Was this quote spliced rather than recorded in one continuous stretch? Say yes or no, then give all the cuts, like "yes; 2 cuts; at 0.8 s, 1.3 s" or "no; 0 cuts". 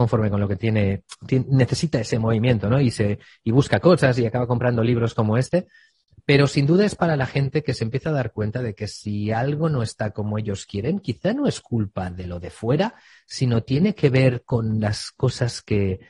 no; 0 cuts